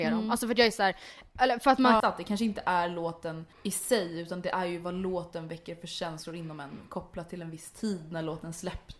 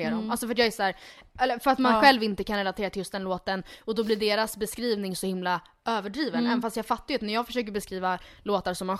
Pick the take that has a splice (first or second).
first